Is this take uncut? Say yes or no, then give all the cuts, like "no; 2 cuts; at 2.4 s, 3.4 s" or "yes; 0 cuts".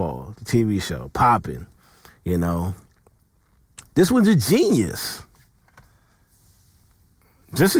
yes; 0 cuts